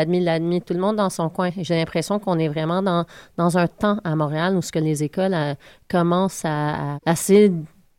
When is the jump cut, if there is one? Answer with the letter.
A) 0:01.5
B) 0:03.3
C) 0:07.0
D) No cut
C